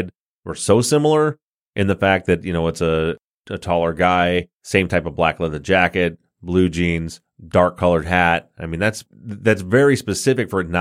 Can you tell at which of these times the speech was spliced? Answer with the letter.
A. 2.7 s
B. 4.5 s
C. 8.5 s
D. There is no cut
B